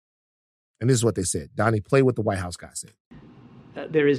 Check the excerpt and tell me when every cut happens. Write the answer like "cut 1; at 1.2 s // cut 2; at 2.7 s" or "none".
none